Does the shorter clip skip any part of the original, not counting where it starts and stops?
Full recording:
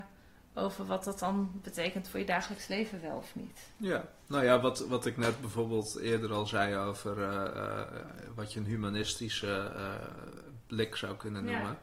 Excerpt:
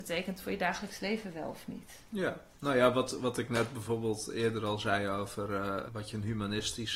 yes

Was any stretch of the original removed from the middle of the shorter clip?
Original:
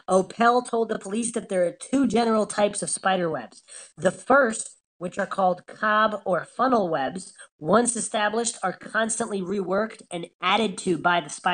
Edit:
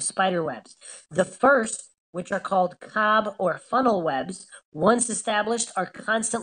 no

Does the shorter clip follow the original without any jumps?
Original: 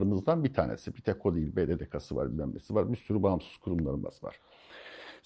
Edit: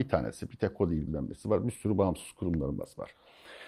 no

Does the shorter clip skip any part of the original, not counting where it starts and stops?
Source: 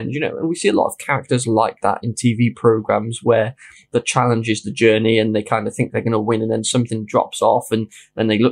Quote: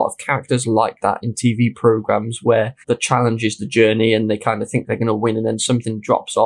yes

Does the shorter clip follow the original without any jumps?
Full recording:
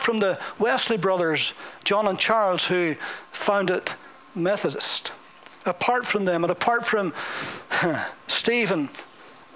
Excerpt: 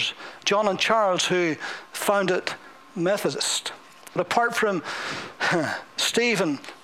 no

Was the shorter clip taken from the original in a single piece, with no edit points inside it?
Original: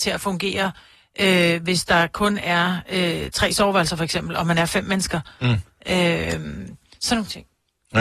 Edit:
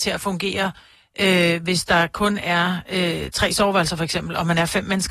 yes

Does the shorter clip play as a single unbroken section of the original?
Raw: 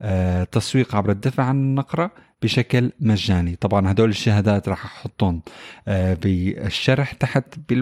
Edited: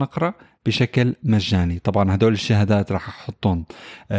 yes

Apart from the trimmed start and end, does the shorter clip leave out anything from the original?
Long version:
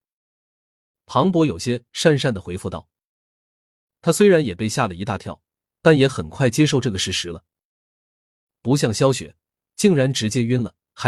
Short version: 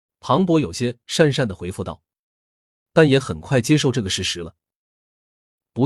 yes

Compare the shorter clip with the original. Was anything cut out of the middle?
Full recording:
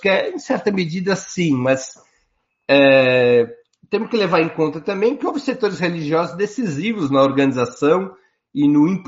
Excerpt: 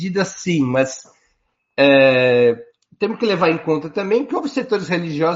no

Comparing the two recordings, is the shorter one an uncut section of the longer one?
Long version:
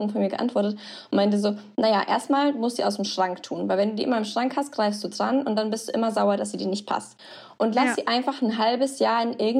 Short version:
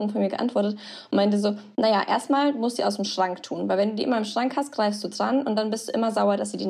yes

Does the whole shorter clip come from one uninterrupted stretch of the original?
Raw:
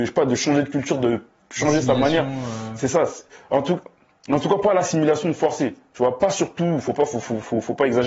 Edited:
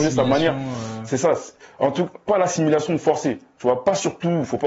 no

